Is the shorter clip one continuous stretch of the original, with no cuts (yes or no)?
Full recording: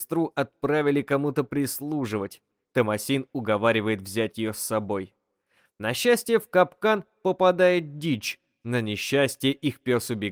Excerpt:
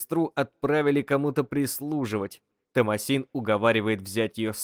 yes